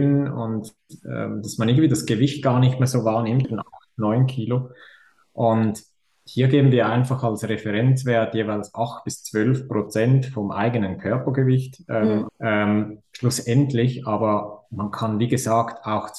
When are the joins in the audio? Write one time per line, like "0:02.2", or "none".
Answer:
0:03.4
0:12.3